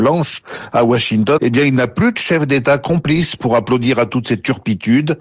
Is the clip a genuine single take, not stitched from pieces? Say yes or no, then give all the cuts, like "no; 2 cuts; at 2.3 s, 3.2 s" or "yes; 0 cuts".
no; 1 cut; at 1.4 s